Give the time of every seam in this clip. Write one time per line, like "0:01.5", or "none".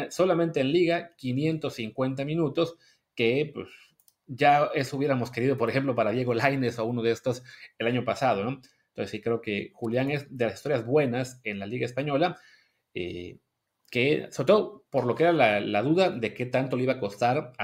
none